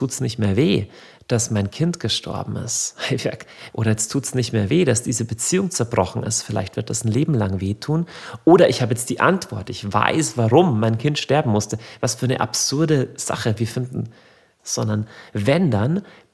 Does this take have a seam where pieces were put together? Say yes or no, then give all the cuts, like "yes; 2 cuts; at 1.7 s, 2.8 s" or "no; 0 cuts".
yes; 2 cuts; at 3.7 s, 14.6 s